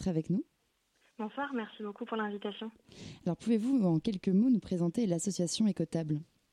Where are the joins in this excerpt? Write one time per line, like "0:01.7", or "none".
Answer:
none